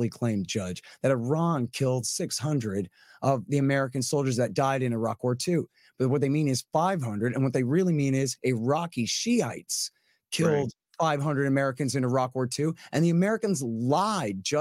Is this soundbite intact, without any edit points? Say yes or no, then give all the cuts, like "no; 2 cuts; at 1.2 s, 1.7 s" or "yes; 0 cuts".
yes; 0 cuts